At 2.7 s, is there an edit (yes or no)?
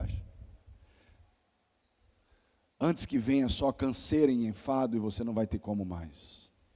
no